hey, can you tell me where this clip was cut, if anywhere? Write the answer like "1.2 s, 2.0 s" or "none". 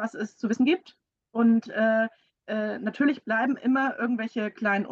none